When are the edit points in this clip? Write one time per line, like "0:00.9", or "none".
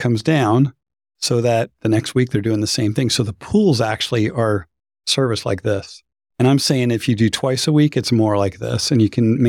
none